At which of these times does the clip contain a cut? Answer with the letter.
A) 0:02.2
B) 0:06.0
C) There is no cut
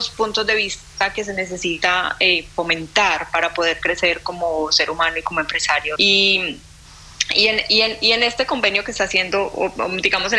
B